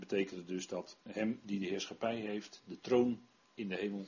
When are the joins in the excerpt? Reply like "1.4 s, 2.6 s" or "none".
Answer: none

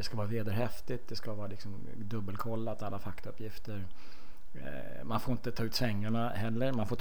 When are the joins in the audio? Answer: none

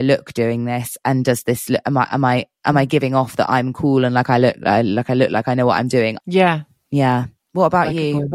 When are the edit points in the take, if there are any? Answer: 6.2 s

